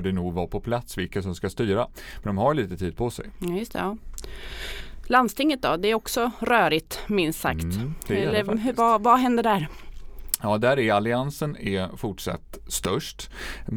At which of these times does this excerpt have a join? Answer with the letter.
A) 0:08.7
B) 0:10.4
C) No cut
C